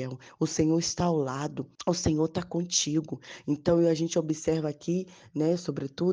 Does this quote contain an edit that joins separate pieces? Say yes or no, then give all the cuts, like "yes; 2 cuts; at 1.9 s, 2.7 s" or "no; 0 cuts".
yes; 1 cut; at 1.7 s